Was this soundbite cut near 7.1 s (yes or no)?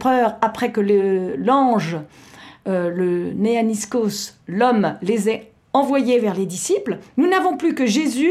no